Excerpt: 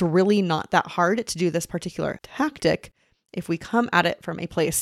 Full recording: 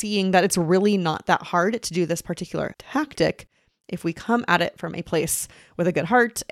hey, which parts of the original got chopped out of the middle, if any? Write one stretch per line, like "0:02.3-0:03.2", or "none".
none